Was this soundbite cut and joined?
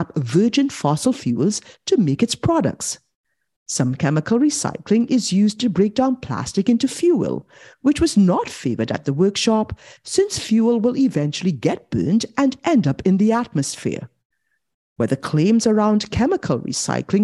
no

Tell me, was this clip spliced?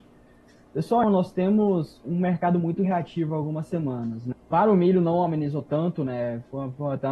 yes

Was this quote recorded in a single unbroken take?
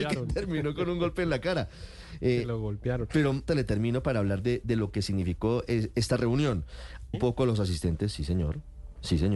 no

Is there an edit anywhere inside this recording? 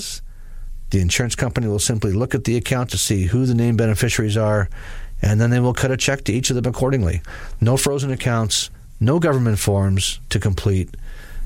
no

